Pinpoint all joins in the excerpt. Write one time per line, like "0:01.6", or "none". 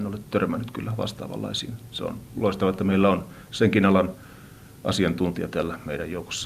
none